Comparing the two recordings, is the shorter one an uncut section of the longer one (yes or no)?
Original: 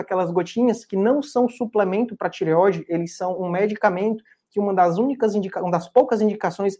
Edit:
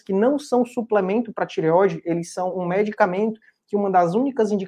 yes